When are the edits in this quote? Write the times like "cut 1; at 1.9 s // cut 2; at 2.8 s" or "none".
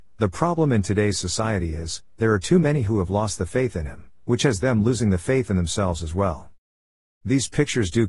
none